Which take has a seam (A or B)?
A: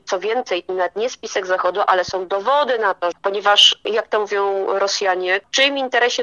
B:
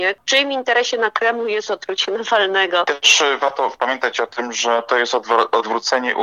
A